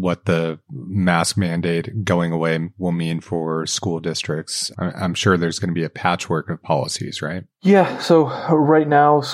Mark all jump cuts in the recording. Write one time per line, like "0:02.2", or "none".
none